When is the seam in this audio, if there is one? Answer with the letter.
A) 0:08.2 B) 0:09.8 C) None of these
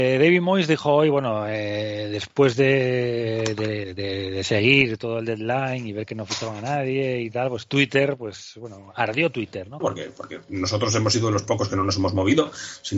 B